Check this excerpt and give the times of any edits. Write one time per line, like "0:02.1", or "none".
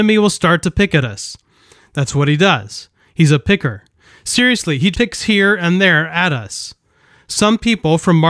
0:04.9